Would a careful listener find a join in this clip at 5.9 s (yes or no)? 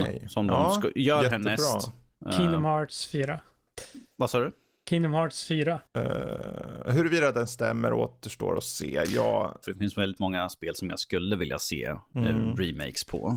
yes